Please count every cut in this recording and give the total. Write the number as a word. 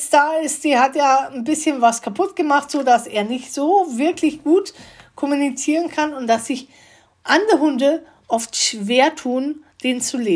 zero